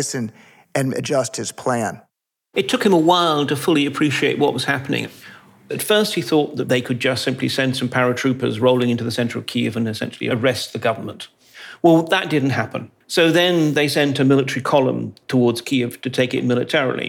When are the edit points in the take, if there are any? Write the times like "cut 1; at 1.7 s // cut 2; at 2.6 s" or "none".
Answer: cut 1; at 13.0 s